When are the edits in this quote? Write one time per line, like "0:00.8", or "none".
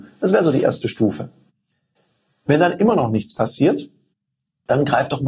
none